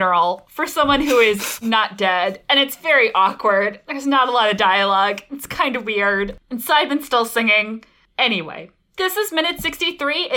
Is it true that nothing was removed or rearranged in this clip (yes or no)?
yes